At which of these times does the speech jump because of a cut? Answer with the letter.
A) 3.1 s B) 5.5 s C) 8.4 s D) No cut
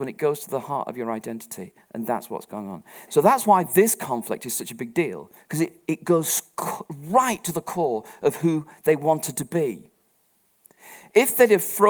A